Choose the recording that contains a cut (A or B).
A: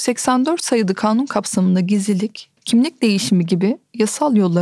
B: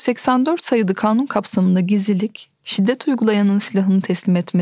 A